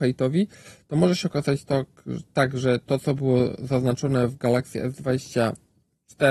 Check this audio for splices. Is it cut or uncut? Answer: uncut